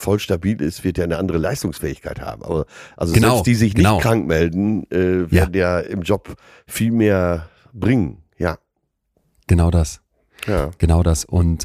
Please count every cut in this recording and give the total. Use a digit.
0